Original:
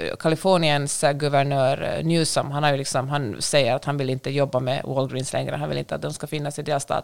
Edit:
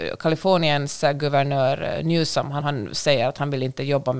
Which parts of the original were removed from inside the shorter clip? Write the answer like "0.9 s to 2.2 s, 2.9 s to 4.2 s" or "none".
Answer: 2.6 s to 3.1 s